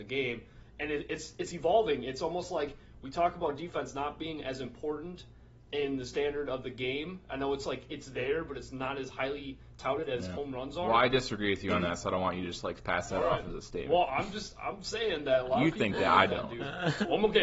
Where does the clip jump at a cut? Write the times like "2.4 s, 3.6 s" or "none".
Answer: none